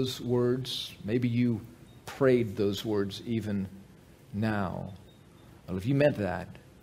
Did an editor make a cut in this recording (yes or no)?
no